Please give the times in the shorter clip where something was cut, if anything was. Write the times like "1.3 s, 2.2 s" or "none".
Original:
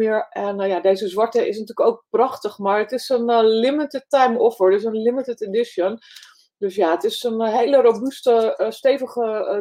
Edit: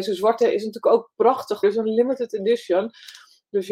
1.6 s